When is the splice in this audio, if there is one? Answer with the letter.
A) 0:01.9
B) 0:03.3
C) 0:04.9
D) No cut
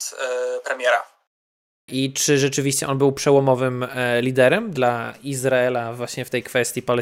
A